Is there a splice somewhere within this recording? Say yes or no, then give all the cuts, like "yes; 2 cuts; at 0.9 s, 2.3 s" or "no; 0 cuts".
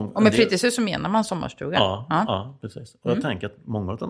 no; 0 cuts